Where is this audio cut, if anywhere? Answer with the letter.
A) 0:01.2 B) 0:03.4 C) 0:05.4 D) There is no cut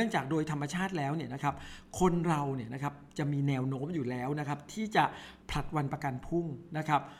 C